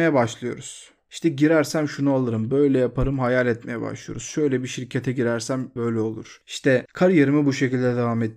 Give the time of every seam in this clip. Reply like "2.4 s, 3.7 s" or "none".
5.8 s